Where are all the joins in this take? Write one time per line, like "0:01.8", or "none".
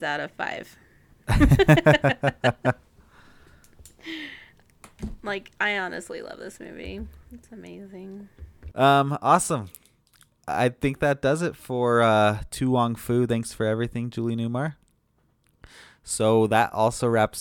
none

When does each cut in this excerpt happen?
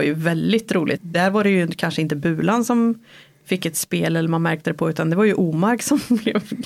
0:01.0

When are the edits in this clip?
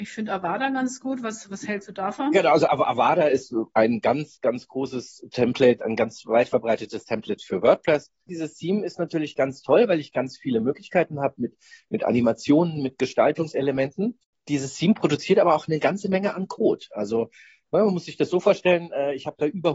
0:08.3

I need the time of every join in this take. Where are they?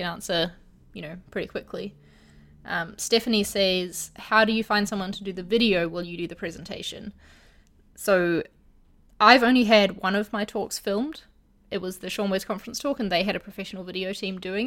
none

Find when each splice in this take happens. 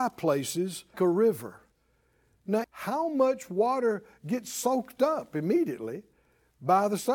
0:00.9
0:02.6

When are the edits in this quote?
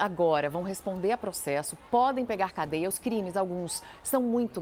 none

